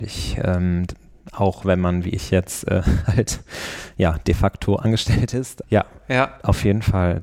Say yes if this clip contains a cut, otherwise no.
yes